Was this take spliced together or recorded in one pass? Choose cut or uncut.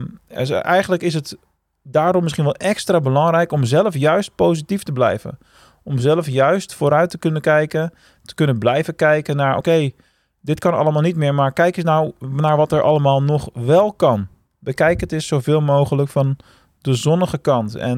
uncut